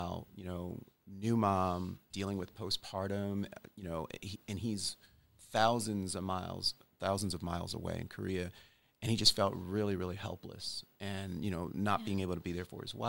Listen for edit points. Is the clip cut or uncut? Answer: cut